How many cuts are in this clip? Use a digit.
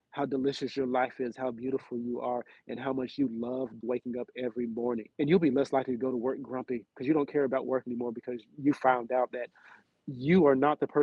2